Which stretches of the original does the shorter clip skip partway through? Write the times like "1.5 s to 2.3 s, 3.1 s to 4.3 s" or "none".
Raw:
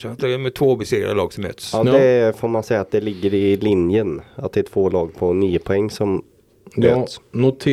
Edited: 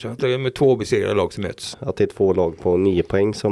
1.7 s to 4.3 s